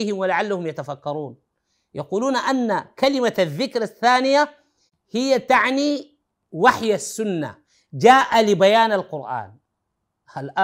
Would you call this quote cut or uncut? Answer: uncut